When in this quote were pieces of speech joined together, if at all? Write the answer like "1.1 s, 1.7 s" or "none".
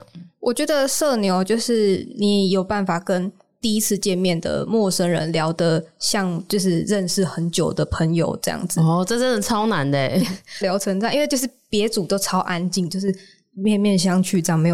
10.6 s